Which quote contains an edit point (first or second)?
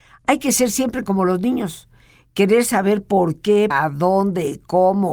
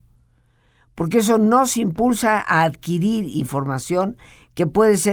first